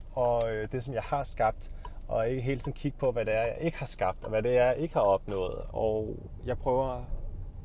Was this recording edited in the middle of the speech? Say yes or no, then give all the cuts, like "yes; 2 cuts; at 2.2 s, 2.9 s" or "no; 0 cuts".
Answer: yes; 1 cut; at 5.7 s